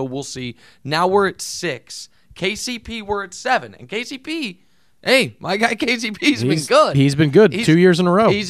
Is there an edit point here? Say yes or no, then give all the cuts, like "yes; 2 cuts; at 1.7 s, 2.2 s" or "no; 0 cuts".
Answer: no; 0 cuts